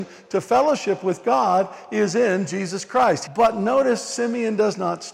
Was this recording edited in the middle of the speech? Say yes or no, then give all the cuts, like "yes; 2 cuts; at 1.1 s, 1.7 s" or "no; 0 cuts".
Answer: yes; 1 cut; at 3.3 s